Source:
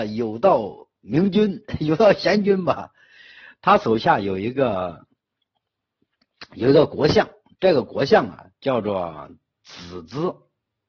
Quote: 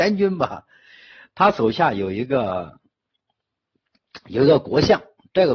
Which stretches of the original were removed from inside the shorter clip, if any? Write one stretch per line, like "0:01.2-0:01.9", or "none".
none